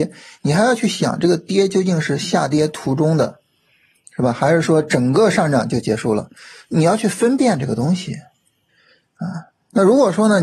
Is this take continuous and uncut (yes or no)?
yes